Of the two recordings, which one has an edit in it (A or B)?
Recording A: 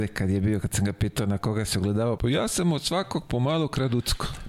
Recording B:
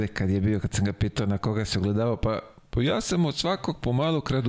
A